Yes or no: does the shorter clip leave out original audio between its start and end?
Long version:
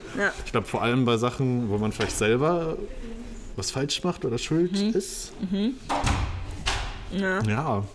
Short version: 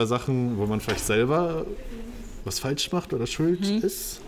no